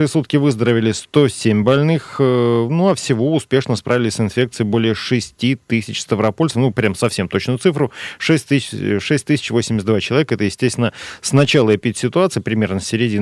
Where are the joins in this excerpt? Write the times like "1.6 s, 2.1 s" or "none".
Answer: none